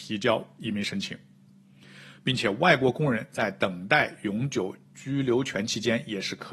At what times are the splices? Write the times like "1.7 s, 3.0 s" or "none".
none